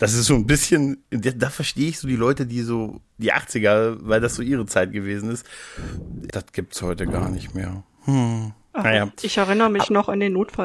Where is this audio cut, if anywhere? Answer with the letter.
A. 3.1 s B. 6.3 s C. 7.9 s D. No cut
B